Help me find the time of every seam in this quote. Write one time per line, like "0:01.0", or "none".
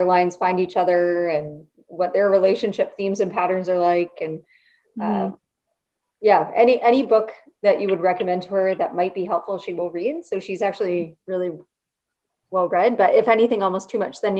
none